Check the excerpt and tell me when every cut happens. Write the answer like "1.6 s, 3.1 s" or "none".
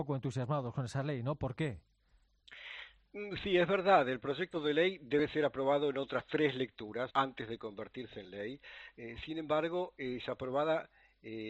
7.1 s